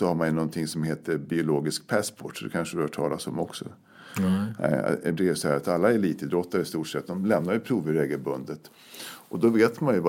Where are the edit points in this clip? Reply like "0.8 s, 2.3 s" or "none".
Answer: 5.1 s